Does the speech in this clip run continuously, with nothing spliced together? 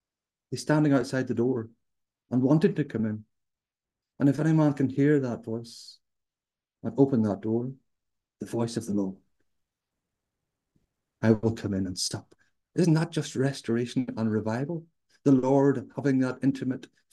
yes; 0 cuts

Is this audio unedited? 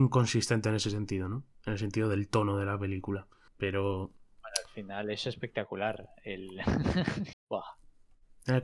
no; 2 cuts; at 3.5 s, 7.3 s

